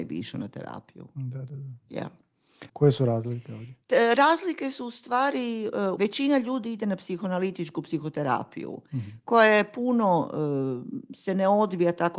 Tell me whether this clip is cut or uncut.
cut